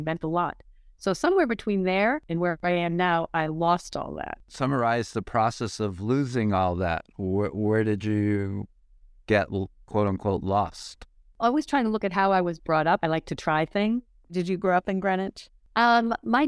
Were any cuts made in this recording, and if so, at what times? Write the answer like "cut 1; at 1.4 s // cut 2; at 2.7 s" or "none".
cut 1; at 4.4 s // cut 2; at 13.0 s